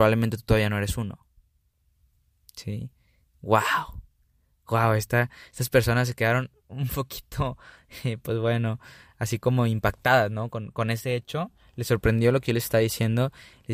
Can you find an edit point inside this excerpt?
no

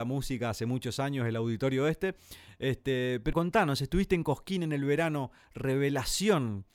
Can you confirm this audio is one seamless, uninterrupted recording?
no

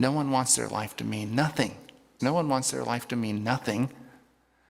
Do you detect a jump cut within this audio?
yes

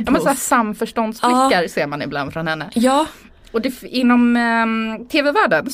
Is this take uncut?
yes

